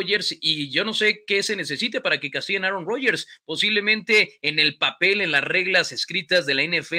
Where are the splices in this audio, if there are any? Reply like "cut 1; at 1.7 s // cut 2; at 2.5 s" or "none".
none